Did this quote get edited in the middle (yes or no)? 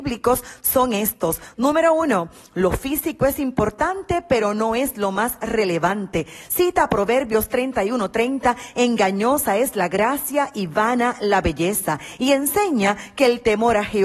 no